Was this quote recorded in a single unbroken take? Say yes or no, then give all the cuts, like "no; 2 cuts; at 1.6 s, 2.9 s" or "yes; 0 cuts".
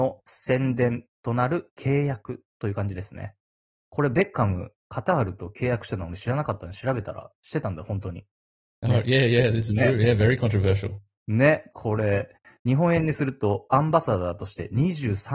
yes; 0 cuts